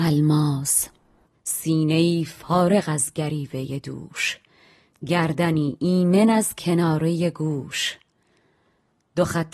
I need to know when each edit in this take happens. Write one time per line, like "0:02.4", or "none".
none